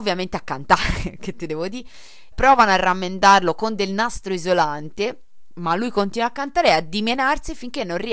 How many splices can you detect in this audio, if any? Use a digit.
1